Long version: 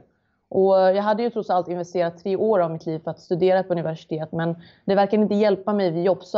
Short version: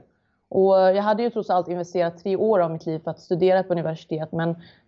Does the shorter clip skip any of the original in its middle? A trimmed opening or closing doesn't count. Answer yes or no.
no